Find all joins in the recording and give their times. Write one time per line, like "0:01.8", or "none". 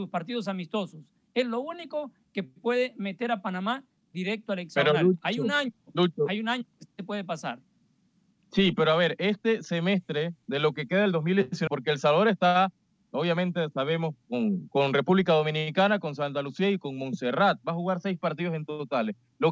0:11.7